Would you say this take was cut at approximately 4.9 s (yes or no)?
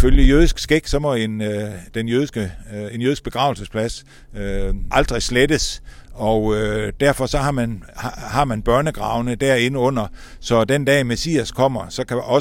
yes